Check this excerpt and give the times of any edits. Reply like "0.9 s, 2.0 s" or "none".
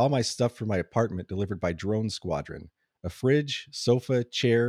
none

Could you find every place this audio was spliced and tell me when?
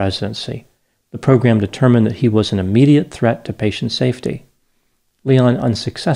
0.9 s

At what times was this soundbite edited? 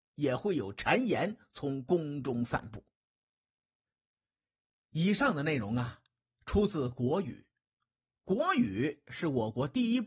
none

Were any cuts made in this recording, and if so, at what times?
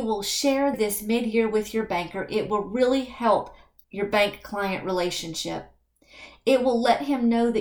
none

